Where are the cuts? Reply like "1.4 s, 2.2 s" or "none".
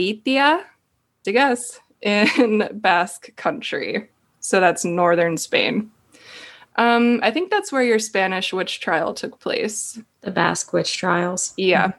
1.2 s